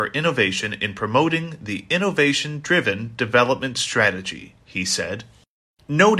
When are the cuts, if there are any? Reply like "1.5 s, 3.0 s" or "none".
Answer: none